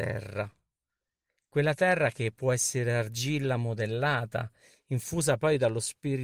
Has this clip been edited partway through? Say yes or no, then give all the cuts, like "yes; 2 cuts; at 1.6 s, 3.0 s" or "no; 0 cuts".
no; 0 cuts